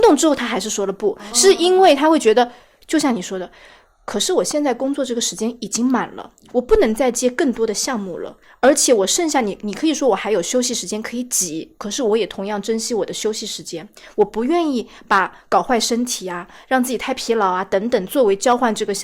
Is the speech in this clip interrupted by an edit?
no; 0 cuts

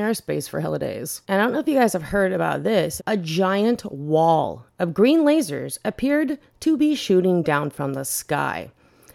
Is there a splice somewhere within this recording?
yes; 2 cuts; at 1.2 s, 3.0 s

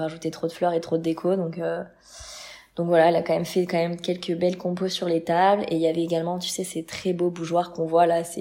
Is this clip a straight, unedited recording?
yes; 0 cuts

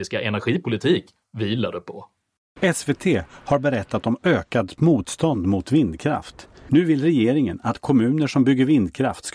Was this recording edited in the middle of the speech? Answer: no; 0 cuts

